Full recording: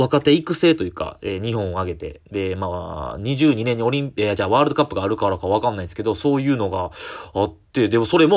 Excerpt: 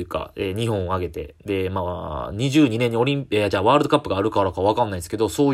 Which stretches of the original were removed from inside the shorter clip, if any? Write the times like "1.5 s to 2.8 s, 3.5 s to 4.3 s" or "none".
none